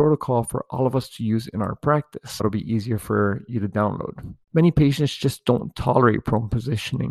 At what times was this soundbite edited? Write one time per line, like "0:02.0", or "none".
0:02.4
0:04.4